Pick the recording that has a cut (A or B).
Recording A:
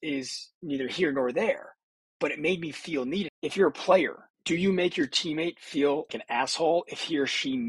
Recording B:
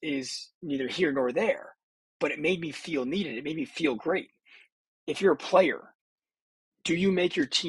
A